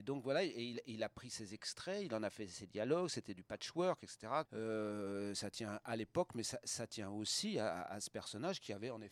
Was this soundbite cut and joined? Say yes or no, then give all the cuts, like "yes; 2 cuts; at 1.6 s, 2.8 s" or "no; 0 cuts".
yes; 1 cut; at 4.5 s